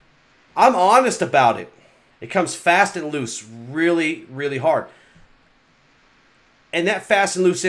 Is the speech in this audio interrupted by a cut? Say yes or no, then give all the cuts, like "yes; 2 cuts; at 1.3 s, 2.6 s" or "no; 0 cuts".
yes; 1 cut; at 2.1 s